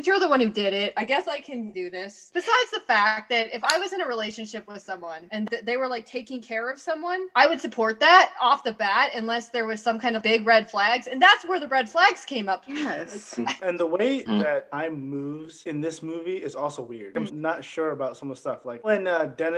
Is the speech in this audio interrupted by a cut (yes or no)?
yes